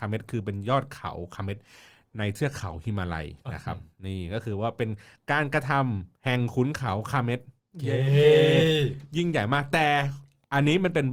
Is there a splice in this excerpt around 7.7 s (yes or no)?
yes